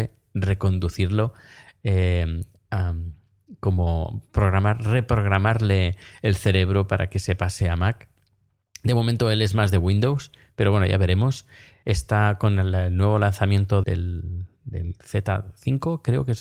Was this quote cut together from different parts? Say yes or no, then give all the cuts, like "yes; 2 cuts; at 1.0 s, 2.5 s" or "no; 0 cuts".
yes; 2 cuts; at 11.8 s, 13.8 s